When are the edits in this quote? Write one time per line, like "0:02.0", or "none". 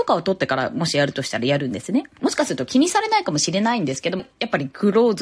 0:02.2
0:04.2